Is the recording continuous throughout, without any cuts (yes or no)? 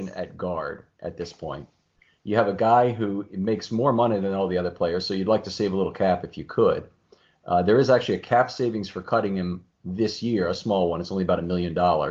yes